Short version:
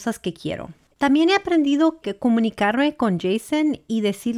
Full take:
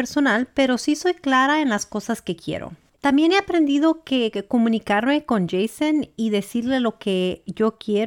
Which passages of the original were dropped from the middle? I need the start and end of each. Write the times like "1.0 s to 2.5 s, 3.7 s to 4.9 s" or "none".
4.0 s to 4.3 s